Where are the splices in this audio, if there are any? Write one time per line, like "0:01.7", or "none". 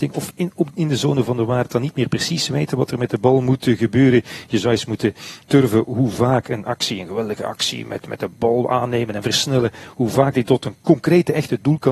0:05.4